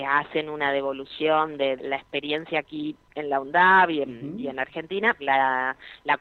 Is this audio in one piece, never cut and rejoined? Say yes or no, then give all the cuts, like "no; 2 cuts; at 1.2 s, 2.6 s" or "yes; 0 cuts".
no; 2 cuts; at 1.8 s, 5.2 s